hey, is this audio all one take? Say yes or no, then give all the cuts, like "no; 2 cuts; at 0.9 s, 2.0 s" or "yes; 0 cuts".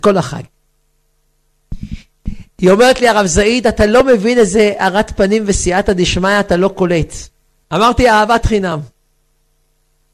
no; 1 cut; at 7.6 s